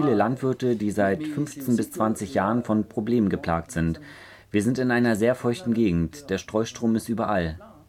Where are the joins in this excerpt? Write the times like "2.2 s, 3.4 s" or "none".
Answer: none